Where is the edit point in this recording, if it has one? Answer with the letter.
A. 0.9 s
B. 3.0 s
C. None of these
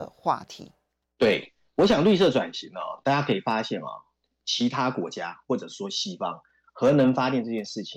B